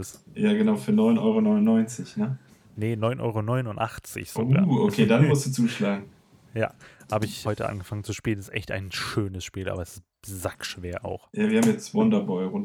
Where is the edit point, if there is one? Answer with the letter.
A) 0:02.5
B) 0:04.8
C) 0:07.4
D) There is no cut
C